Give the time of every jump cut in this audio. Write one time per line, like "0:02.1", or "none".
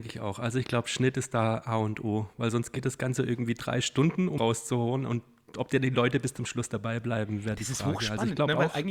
0:04.4